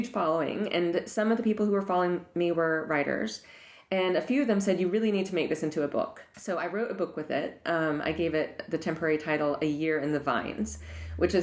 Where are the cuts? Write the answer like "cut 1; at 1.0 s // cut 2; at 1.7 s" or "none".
cut 1; at 6.3 s